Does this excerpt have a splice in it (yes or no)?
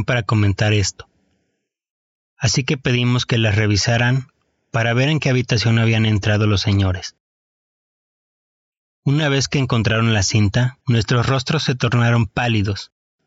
yes